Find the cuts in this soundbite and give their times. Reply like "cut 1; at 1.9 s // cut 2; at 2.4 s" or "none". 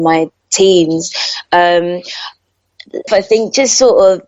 cut 1; at 3.1 s